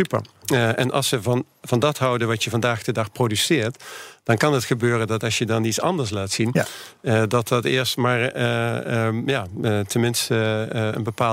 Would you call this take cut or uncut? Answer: uncut